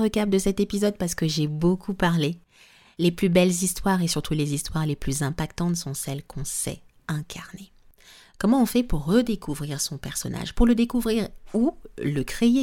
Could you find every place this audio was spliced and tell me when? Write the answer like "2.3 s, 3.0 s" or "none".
none